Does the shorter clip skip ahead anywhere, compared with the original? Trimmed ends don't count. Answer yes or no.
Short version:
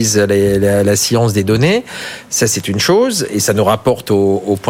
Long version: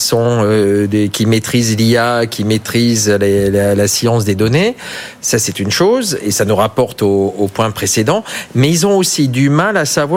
no